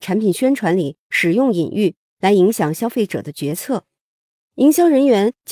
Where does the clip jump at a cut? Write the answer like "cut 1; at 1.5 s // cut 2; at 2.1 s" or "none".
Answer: cut 1; at 4.4 s